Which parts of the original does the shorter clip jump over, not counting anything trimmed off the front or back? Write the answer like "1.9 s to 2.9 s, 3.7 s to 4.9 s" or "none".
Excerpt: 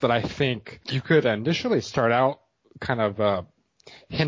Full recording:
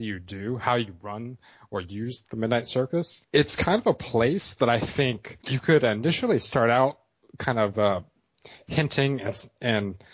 none